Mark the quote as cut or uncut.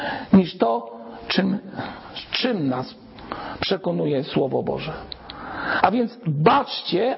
uncut